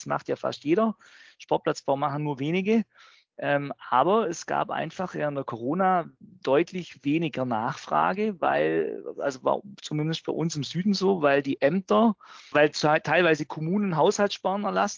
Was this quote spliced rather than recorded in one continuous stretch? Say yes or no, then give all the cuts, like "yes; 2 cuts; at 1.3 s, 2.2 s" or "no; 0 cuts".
yes; 1 cut; at 12.5 s